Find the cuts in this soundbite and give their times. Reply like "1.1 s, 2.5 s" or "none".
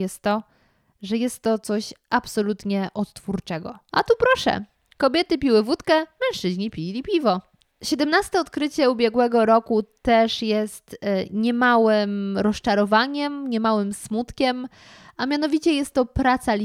3.9 s, 7.6 s